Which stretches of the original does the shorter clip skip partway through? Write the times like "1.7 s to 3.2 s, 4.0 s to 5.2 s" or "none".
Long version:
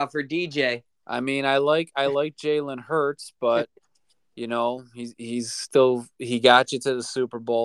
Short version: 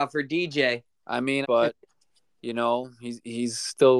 1.4 s to 3.4 s